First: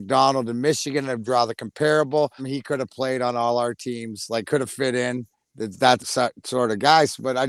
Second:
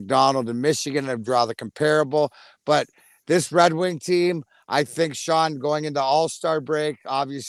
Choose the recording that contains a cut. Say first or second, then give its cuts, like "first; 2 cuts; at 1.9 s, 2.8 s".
first; 2 cuts; at 2.4 s, 6.0 s